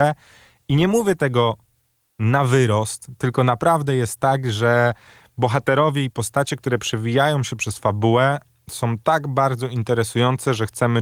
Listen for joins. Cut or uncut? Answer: uncut